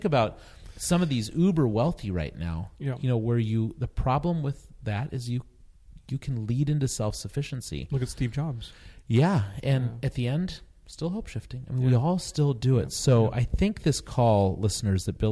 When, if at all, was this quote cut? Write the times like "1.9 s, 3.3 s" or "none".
none